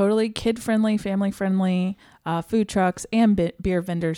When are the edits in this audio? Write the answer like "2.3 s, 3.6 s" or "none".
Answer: none